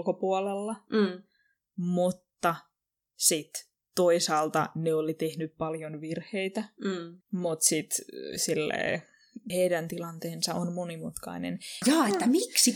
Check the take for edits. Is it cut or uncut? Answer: cut